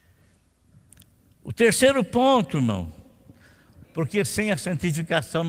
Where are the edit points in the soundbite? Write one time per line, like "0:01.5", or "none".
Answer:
0:03.8